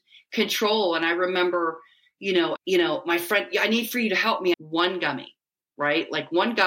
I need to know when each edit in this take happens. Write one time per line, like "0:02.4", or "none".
0:02.6
0:04.5